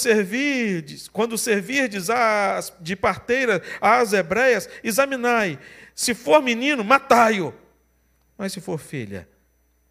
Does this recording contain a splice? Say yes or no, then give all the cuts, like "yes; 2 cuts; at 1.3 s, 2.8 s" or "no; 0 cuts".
no; 0 cuts